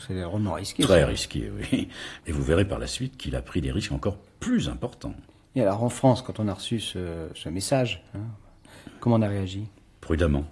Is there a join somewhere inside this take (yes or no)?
yes